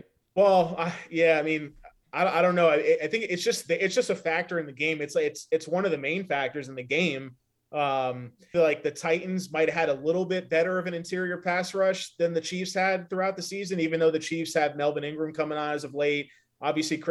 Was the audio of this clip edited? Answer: yes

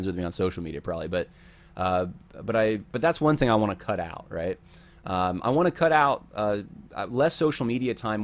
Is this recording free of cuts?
yes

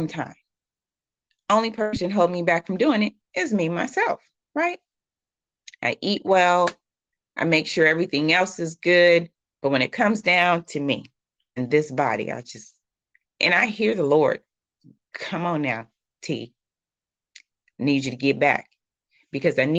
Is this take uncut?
yes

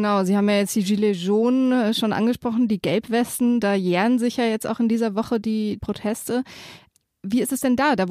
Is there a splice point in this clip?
no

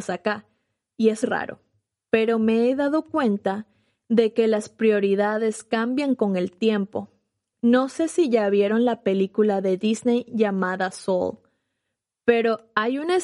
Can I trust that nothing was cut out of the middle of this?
no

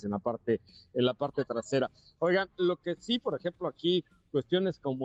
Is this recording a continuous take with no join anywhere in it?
yes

